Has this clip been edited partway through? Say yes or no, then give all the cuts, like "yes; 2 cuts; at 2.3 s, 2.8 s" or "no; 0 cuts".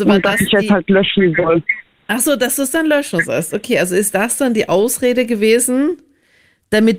no; 0 cuts